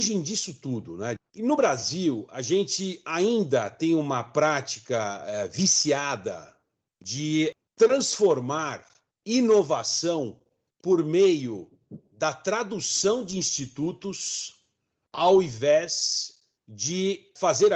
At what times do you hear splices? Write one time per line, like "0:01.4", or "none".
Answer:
0:01.2